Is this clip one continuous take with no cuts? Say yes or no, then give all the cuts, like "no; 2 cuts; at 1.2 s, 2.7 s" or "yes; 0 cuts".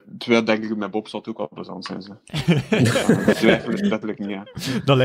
no; 1 cut; at 4.0 s